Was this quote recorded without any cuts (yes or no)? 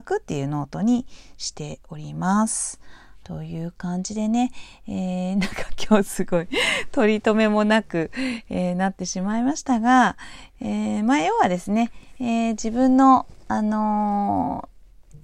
no